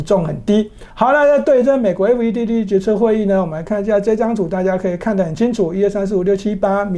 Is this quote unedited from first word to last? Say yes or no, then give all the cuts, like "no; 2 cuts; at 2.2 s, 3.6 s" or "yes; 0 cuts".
no; 1 cut; at 0.9 s